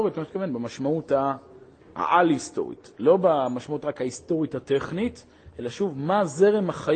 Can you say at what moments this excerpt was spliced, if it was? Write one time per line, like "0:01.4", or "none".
none